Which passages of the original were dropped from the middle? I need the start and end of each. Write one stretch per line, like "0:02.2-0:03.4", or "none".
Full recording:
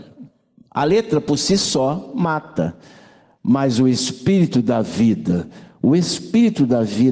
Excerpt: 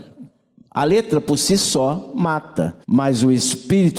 0:02.8-0:03.4